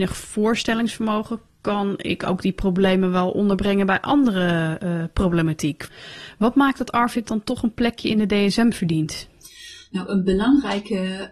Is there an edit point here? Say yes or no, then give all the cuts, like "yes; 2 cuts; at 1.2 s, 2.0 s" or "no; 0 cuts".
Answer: no; 0 cuts